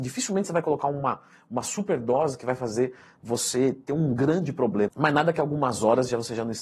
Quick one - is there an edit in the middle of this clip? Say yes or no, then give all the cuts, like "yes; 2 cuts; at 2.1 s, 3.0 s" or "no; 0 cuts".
yes; 1 cut; at 4.9 s